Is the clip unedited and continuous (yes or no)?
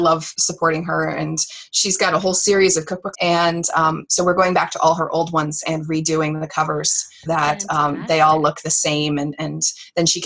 no